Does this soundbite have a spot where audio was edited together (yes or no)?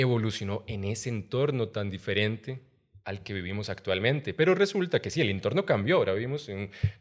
no